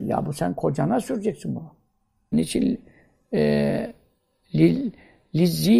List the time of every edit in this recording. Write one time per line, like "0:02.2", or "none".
0:02.3